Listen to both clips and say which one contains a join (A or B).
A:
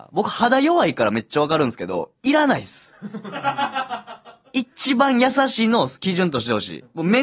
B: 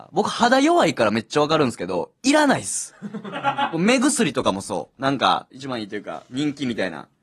B